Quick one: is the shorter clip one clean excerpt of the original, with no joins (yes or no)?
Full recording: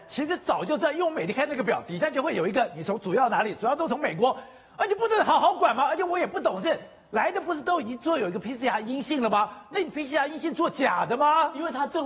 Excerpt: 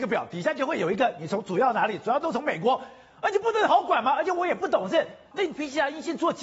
no